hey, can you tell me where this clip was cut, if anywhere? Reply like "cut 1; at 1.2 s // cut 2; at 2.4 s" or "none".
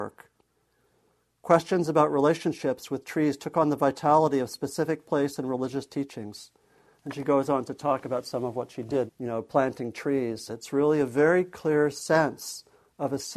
cut 1; at 9.1 s // cut 2; at 10.5 s